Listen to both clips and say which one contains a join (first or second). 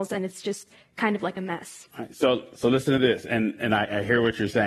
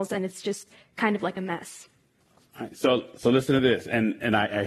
first